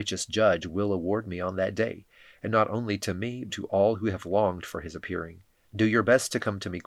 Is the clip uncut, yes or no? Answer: no